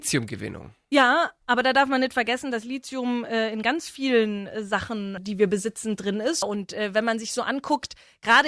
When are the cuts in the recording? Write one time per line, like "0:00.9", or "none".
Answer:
0:05.2
0:06.4